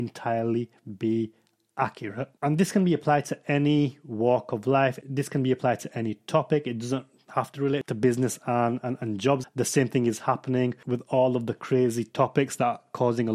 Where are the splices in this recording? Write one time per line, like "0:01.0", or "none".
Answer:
0:09.4